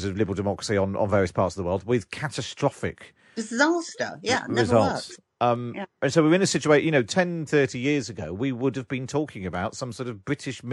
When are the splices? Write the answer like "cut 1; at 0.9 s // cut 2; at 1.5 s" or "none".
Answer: cut 1; at 7.5 s